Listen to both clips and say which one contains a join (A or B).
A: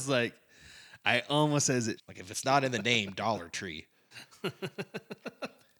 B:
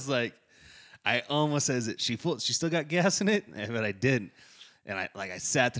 A